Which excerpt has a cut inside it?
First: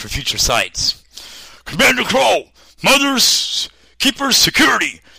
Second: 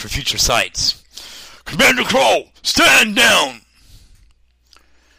second; 1 cut; at 2.6 s

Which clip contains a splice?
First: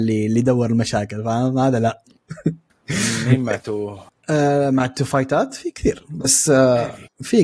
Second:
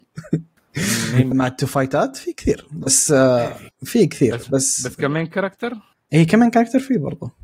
second; 1 cut; at 1.3 s

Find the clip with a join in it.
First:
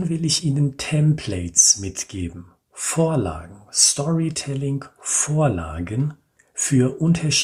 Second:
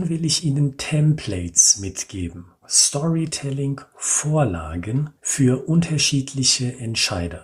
second; 2 cuts; at 2.6 s, 5.2 s

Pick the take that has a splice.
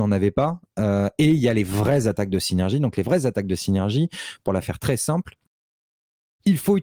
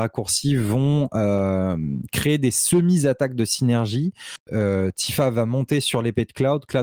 second; 1 cut; at 4.5 s

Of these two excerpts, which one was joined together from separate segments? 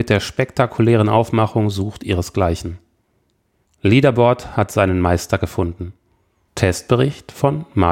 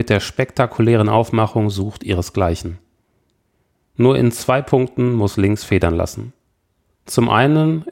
first; 2 cuts; at 3.6 s, 6.5 s

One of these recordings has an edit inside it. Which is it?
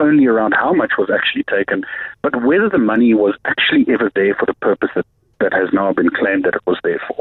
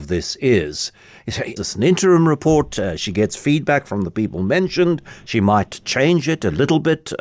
second; 1 cut; at 1.6 s

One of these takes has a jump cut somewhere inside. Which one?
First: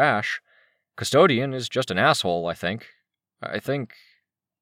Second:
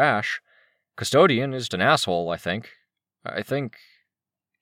second; 1 cut; at 1.7 s

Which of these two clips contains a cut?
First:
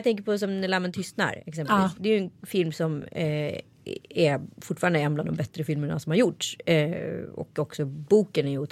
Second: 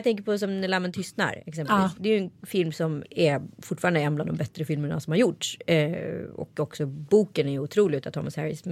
second; 1 cut; at 3.0 s

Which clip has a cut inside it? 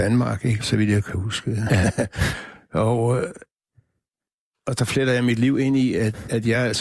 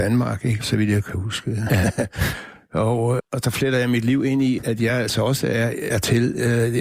second; 3 cuts; at 3.2 s, 4.6 s, 5.9 s

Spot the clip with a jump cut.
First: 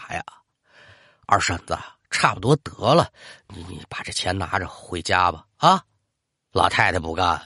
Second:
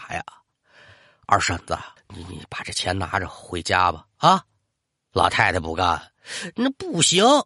second; 1 cut; at 2.0 s

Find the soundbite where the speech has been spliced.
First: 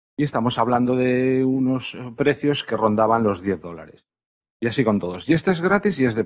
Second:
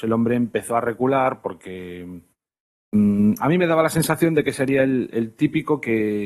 first; 1 cut; at 4.4 s

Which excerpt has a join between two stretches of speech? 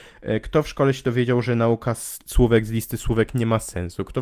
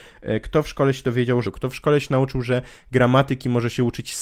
second; 1 cut; at 1.4 s

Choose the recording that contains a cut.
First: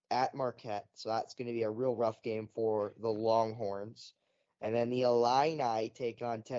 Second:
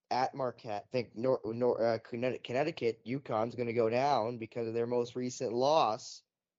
second; 1 cut; at 0.9 s

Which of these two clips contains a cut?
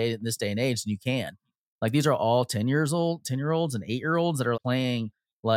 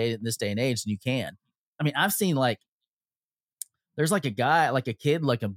first; 2 cuts; at 1.7 s, 4.5 s

